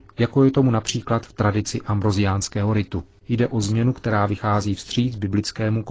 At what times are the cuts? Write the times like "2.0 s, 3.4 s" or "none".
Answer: 3.2 s